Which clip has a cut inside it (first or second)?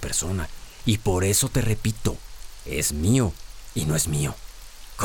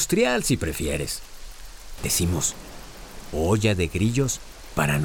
second